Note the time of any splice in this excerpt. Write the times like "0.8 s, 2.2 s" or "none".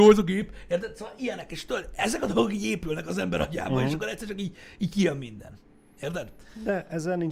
none